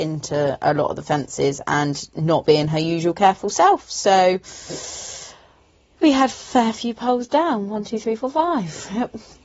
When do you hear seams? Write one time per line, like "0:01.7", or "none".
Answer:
none